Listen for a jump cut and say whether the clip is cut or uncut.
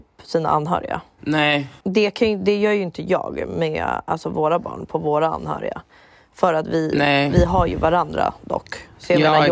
uncut